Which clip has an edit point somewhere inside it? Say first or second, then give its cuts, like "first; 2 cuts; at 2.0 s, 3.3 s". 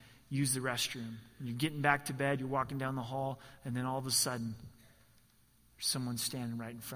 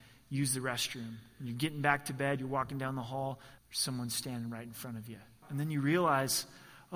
second; 2 cuts; at 3.6 s, 5.4 s